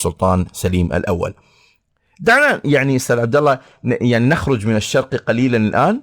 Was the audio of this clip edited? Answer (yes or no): no